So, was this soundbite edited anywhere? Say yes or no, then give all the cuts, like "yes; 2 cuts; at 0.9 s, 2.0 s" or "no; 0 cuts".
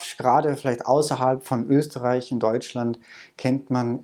no; 0 cuts